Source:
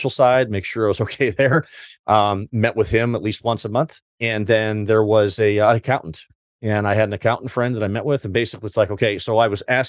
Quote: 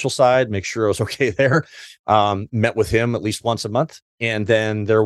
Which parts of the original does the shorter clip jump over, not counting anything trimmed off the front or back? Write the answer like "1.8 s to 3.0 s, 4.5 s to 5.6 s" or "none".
none